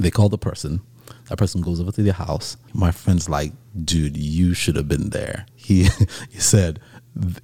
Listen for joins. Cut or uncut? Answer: cut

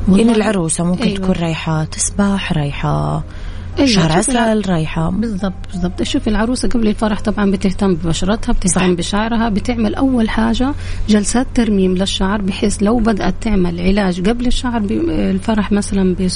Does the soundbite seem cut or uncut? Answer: uncut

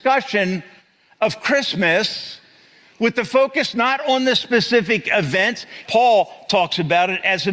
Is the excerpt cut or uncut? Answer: cut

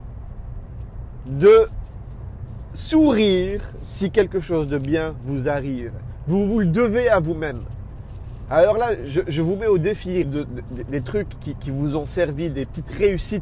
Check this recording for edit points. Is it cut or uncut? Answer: cut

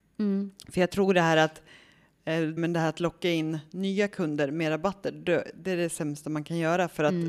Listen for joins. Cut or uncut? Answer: cut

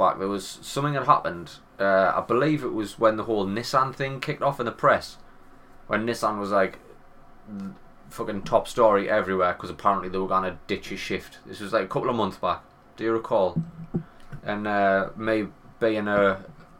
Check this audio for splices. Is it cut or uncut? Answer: cut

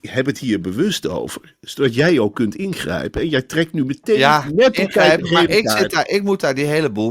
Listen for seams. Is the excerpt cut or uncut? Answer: uncut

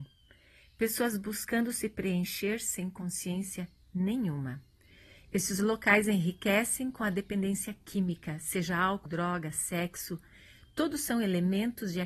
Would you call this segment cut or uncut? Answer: cut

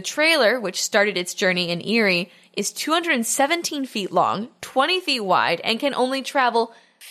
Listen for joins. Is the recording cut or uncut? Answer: uncut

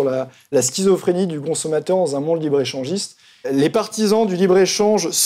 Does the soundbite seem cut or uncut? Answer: cut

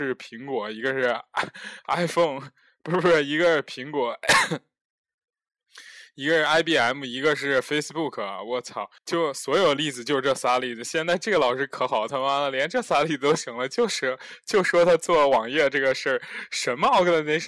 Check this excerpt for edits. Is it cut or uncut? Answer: cut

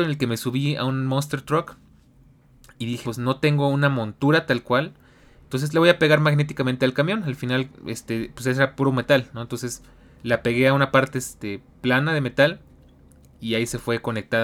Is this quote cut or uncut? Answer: cut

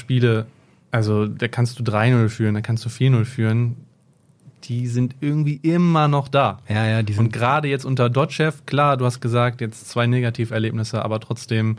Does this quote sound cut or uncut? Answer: uncut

